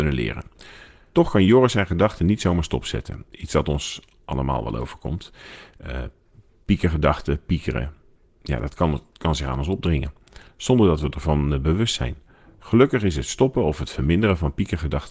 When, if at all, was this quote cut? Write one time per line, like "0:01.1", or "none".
0:01.1